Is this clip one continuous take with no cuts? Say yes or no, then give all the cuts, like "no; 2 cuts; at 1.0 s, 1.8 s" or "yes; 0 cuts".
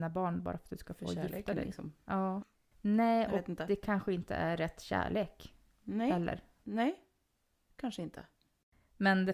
no; 2 cuts; at 2.4 s, 6.6 s